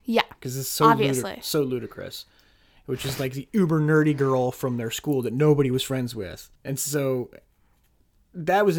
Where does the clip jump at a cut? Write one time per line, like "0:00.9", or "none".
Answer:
0:02.8
0:06.6